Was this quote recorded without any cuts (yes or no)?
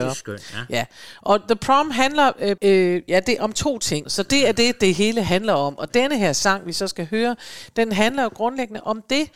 no